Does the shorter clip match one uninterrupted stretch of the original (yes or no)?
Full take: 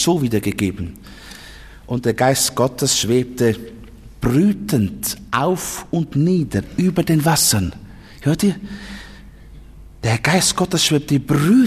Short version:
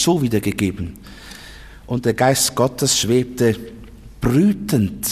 yes